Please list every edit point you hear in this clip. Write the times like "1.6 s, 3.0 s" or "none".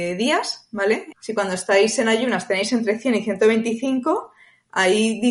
1.1 s